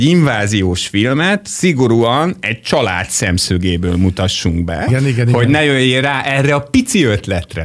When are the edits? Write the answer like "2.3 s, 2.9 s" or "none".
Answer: 4.9 s